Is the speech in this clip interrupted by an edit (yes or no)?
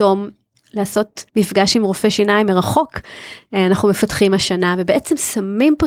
yes